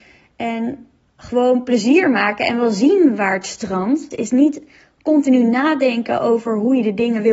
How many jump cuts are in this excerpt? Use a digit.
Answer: 1